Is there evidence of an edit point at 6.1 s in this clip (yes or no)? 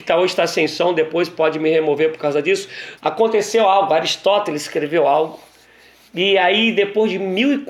no